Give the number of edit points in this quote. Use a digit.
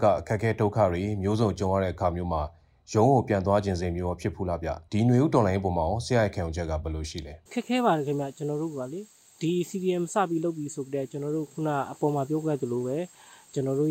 2